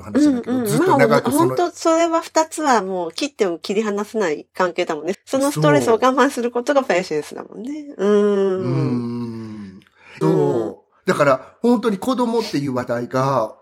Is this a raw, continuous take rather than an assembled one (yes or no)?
no